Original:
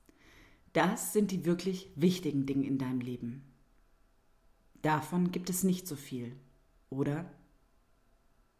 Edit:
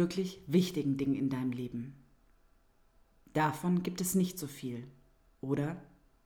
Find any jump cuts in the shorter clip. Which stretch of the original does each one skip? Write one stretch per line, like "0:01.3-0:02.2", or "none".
none